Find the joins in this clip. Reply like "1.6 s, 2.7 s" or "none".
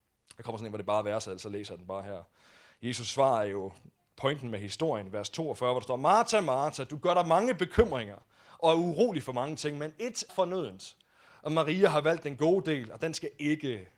10.3 s